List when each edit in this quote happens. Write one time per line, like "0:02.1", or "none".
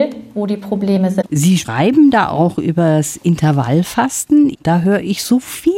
0:01.2
0:04.5